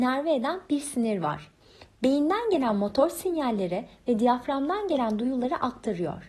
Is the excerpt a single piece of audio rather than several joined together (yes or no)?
no